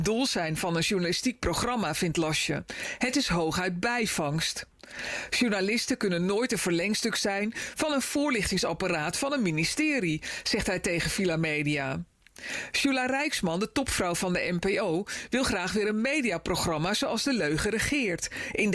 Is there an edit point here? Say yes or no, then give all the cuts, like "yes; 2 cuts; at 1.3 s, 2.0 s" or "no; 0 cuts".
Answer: no; 0 cuts